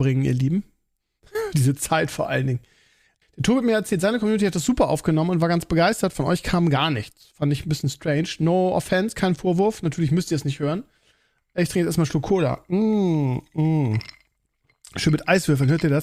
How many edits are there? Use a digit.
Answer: 1